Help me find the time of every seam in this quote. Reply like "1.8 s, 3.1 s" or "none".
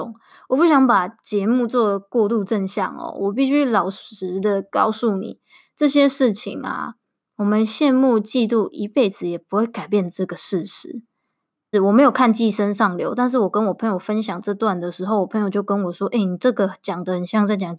11.7 s